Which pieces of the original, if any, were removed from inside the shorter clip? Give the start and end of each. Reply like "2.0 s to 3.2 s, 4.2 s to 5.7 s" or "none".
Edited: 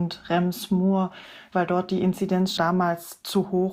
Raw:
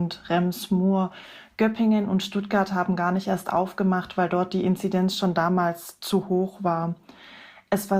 1.5 s to 4.1 s, 5.2 s to 5.3 s

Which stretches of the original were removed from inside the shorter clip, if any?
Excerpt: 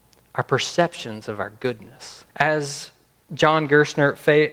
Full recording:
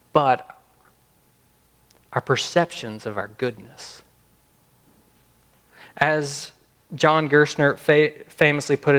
4.1 s to 5.9 s

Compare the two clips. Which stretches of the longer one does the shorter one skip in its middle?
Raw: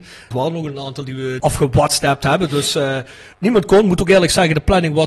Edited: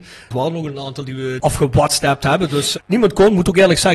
2.7 s to 3.3 s

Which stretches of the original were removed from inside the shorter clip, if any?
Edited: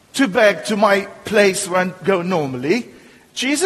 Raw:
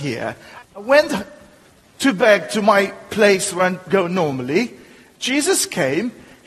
none

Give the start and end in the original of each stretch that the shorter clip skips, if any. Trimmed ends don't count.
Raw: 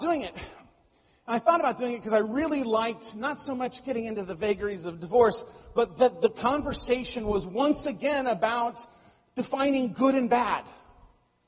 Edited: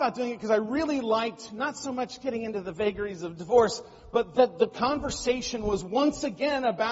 none

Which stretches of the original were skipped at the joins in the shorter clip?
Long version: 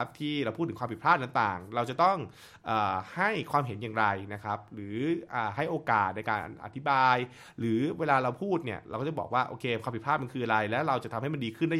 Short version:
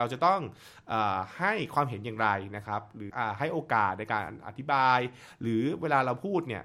4.9 s to 5.3 s

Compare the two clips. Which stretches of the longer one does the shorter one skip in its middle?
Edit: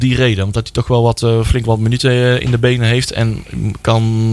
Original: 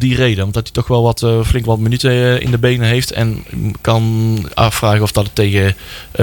none

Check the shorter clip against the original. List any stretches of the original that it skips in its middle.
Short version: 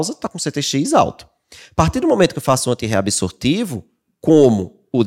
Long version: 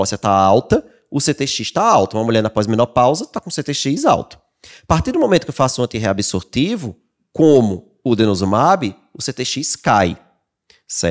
none

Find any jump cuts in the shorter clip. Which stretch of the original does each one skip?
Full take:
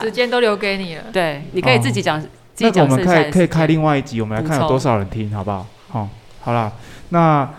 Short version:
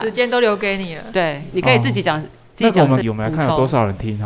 3.0 s to 4.1 s

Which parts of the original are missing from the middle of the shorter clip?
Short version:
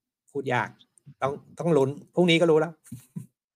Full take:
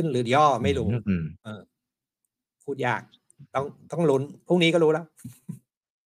none

